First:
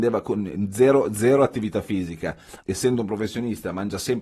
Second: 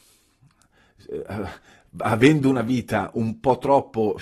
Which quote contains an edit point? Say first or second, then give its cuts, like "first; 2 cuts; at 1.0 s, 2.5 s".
first; 1 cut; at 2.6 s